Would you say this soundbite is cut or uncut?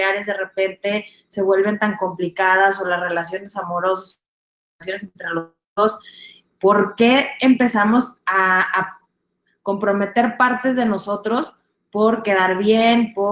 uncut